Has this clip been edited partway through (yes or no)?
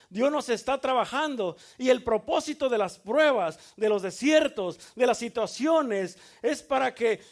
no